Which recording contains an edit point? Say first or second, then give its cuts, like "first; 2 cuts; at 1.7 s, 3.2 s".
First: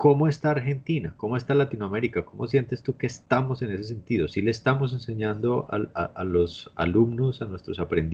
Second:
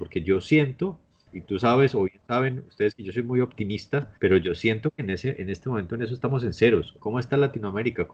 second; 3 cuts; at 1.3 s, 4.2 s, 7.0 s